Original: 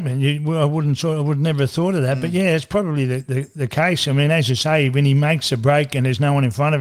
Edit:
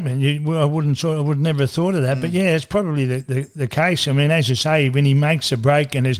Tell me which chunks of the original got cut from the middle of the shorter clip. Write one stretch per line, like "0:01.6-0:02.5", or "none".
none